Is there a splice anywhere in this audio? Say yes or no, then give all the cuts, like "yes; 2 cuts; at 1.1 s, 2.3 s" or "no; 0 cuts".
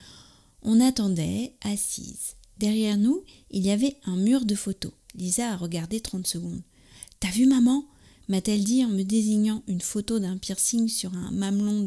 no; 0 cuts